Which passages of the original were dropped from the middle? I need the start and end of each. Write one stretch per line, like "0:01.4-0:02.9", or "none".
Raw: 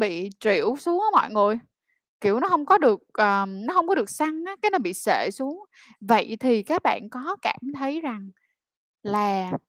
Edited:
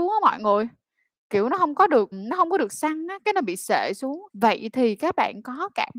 0:03.0-0:03.5
0:05.7-0:06.0